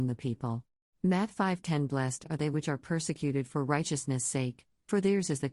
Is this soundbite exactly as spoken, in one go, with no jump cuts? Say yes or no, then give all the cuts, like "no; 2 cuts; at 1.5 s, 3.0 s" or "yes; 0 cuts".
no; 1 cut; at 0.9 s